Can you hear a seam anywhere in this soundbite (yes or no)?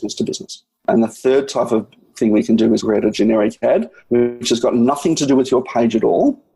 yes